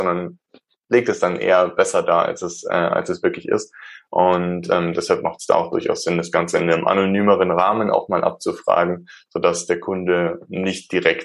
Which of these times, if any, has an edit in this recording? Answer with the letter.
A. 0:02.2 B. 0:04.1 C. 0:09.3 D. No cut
D